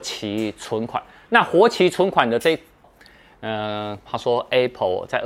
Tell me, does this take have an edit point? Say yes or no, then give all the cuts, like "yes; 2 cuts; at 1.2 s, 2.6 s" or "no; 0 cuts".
yes; 2 cuts; at 2.8 s, 4.1 s